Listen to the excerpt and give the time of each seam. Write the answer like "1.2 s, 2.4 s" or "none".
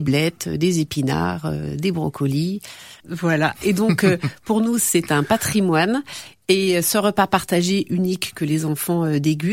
3.0 s